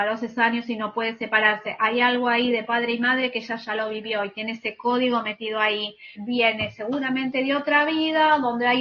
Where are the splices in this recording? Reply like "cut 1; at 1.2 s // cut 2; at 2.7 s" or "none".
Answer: cut 1; at 6.1 s